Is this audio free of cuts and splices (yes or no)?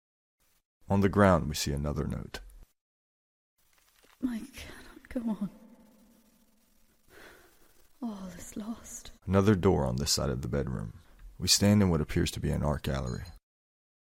no